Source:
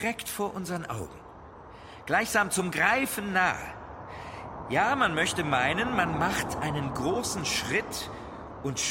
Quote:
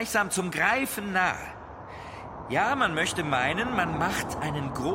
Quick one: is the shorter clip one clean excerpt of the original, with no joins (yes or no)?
yes